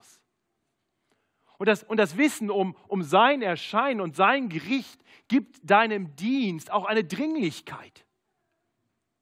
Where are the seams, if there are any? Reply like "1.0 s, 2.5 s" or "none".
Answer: none